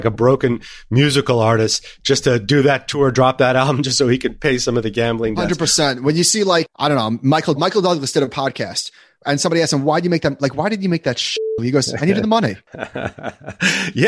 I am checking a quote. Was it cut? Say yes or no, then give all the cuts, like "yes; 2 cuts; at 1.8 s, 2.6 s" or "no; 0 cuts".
yes; 1 cut; at 7.6 s